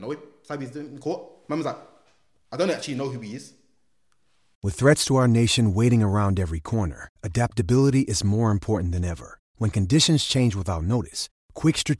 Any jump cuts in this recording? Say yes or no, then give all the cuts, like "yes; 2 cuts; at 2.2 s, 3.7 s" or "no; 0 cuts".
no; 0 cuts